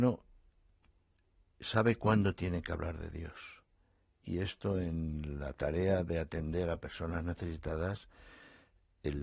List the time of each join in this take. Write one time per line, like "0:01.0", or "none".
none